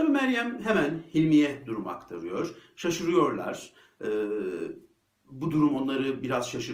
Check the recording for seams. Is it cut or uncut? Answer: uncut